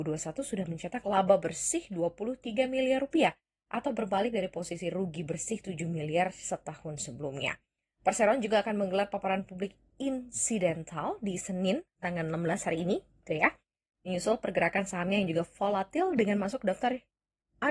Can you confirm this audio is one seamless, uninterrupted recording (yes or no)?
yes